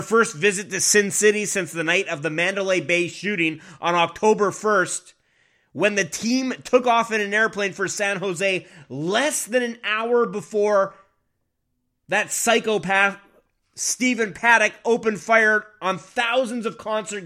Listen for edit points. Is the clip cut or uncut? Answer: uncut